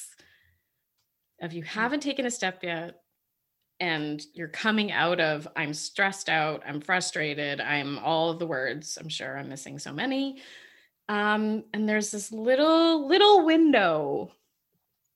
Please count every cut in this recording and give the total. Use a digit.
1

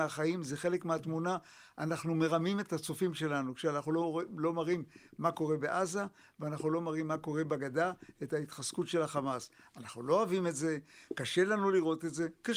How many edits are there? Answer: 0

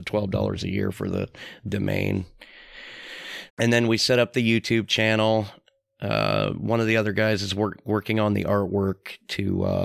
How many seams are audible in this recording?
1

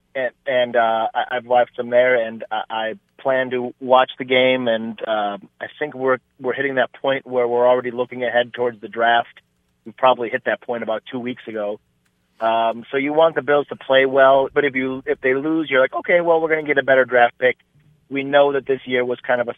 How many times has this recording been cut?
1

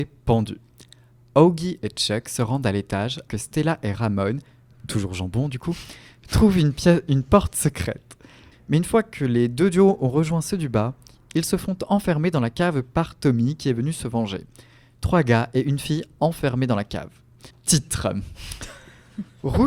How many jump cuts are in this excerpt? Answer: 3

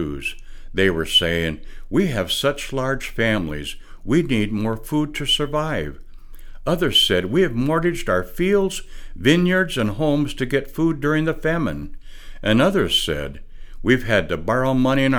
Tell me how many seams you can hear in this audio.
0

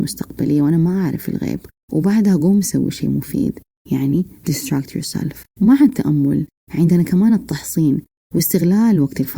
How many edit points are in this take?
1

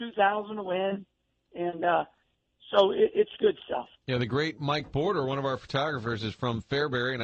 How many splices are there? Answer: 1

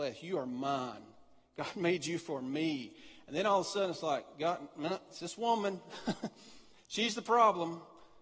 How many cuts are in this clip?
0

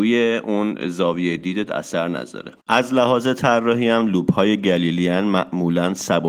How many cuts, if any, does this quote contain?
1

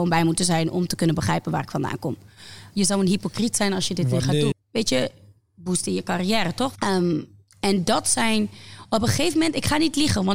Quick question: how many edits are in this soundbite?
3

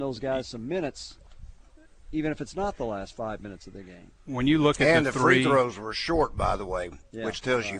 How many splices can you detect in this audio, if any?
1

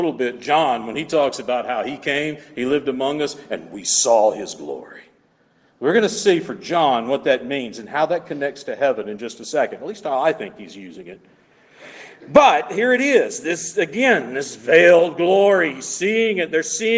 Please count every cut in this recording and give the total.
0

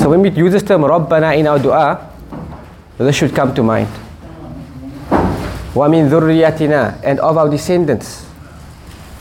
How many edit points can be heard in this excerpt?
1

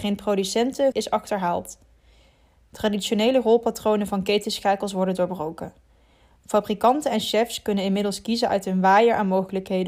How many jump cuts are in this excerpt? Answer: 1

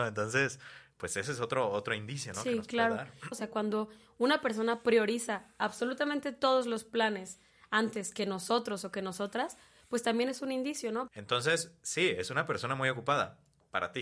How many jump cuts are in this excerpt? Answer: 2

